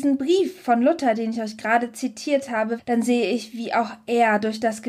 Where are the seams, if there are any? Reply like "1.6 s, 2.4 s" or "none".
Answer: 2.8 s